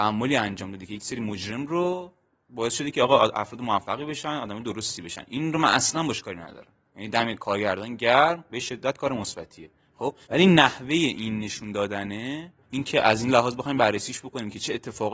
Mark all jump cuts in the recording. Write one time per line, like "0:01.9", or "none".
0:10.2
0:12.6